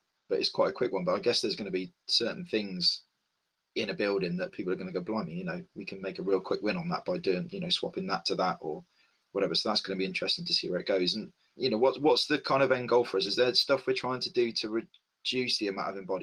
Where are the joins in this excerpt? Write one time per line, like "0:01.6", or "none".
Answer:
none